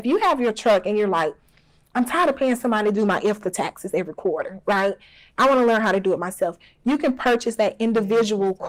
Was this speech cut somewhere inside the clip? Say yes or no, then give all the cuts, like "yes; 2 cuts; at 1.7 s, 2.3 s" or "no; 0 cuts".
no; 0 cuts